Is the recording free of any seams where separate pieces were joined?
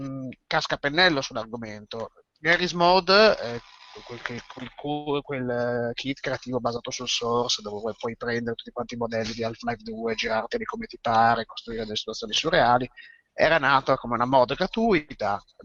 yes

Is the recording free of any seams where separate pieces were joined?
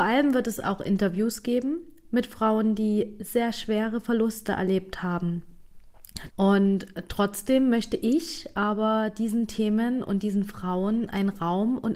no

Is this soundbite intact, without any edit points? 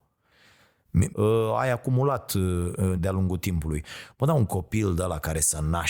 no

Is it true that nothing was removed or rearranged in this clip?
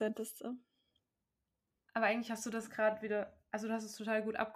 yes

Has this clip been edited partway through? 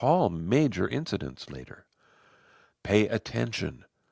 yes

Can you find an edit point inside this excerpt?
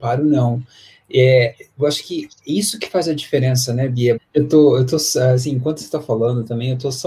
yes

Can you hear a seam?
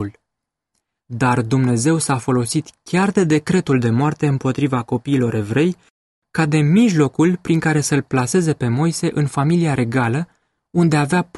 no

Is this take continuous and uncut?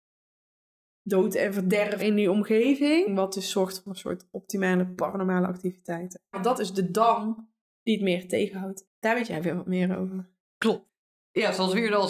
no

